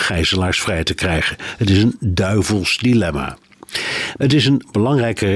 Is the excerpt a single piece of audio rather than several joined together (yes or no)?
no